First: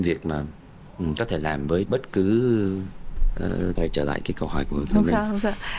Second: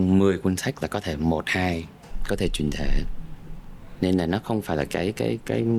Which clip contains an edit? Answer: first; 1 cut; at 3.8 s

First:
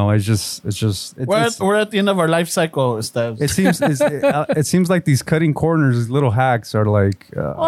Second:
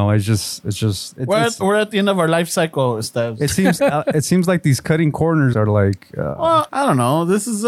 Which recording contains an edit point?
second; 3 cuts; at 3.8 s, 5.5 s, 6.7 s

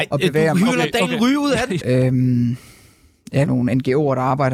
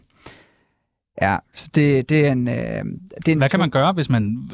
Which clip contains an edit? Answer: first; 2 cuts; at 1.8 s, 3.5 s

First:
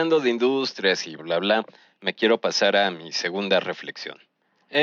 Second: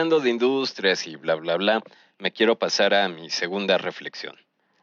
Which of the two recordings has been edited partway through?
first; 1 cut; at 1.2 s

